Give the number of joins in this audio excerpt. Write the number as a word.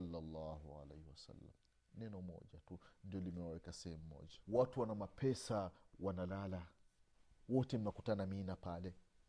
one